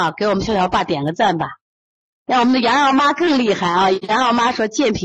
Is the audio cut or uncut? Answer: uncut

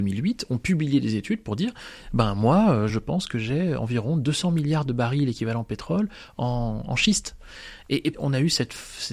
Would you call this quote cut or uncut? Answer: cut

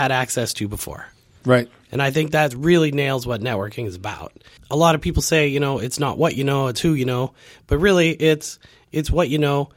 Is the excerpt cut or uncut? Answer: uncut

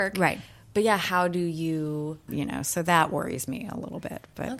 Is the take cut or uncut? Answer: cut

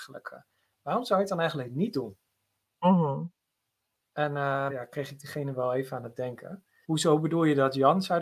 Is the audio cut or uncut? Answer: cut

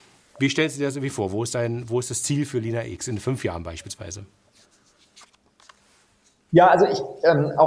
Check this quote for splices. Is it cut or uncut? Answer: uncut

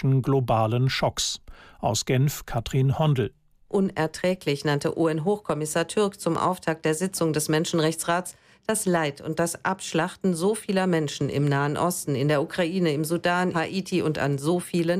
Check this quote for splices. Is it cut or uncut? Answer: cut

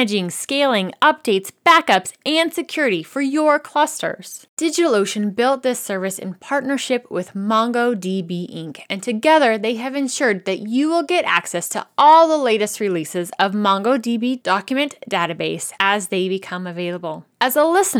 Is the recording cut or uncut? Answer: uncut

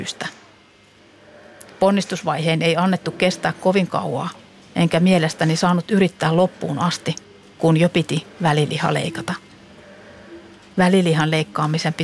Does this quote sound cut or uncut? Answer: cut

